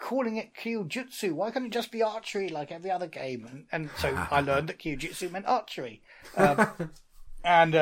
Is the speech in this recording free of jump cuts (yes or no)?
yes